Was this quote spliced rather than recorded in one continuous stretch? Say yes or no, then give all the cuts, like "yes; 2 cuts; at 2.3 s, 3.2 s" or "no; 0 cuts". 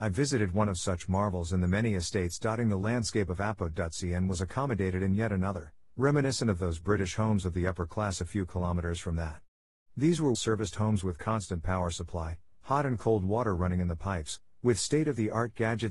yes; 1 cut; at 10.3 s